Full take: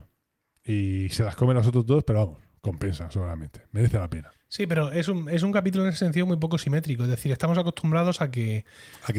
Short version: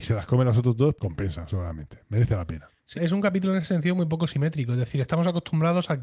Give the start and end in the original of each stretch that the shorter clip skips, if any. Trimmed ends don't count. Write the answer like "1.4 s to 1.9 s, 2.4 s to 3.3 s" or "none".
2.0 s to 2.6 s, 4.6 s to 5.3 s